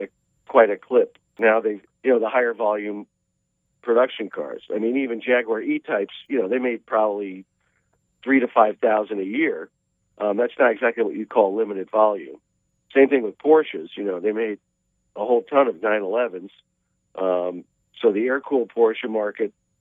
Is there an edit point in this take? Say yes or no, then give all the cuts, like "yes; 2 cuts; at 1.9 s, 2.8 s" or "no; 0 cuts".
yes; 1 cut; at 1.9 s